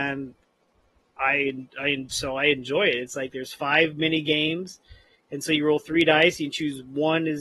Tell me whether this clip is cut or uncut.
uncut